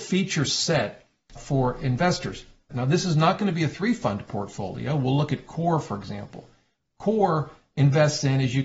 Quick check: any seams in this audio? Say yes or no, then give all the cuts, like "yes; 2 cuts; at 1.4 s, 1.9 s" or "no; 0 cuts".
yes; 2 cuts; at 1.4 s, 2.7 s